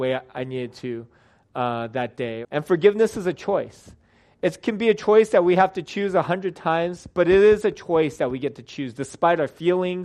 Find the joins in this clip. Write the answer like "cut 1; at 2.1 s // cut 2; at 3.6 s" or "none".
cut 1; at 2.4 s